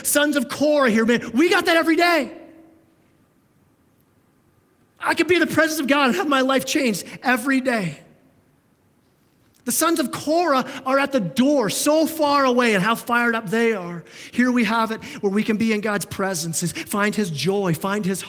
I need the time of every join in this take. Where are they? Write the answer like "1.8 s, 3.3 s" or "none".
none